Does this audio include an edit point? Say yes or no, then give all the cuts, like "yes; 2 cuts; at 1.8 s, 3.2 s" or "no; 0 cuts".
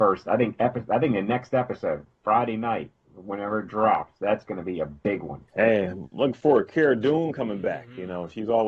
yes; 1 cut; at 5.5 s